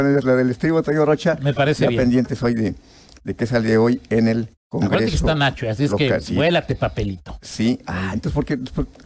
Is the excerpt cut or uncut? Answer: cut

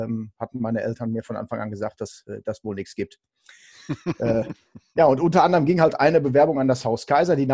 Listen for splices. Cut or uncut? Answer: uncut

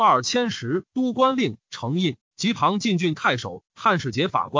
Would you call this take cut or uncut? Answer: cut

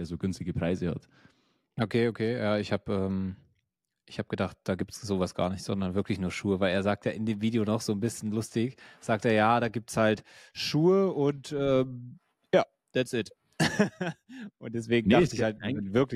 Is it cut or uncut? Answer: uncut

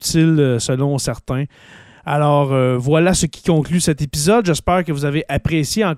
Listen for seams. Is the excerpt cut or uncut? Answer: uncut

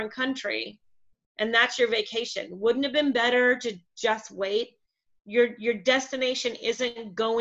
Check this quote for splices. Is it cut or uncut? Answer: cut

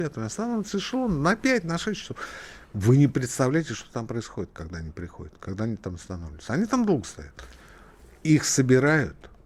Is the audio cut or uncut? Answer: uncut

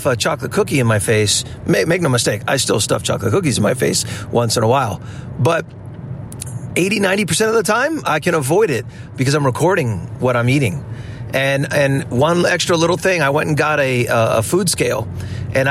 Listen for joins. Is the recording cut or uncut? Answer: uncut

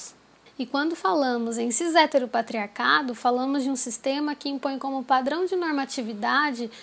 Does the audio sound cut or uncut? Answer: uncut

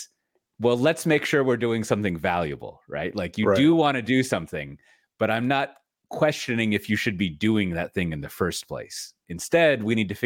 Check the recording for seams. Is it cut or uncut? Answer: uncut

